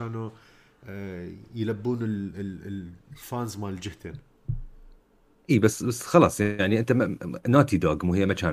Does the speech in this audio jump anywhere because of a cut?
no; 0 cuts

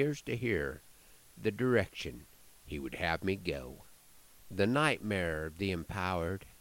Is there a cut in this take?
no; 0 cuts

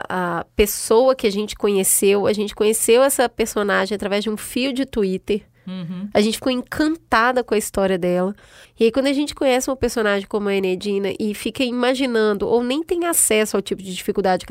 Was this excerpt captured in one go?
no; 1 cut; at 8.6 s

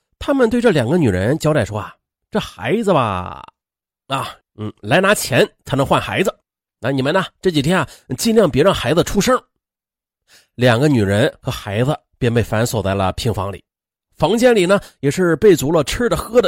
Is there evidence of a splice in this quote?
yes; 1 cut; at 4.4 s

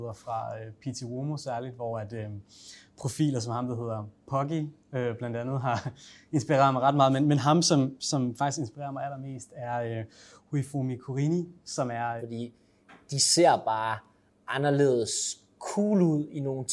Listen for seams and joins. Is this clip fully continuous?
no; 1 cut; at 12.2 s

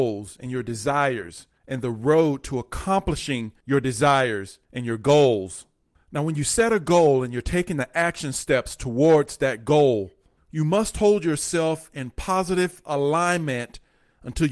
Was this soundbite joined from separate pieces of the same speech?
no; 0 cuts

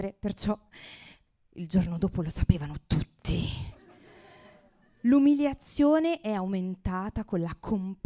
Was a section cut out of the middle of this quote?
no; 0 cuts

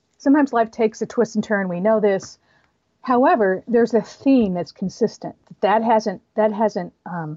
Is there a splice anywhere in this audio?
no; 0 cuts

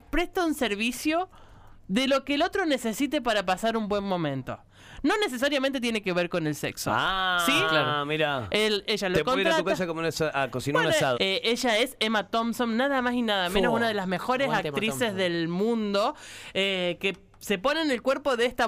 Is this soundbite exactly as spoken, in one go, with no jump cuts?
no; 1 cut; at 11.1 s

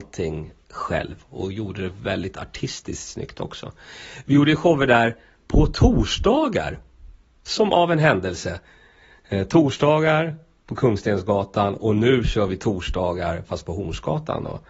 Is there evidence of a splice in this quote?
no; 0 cuts

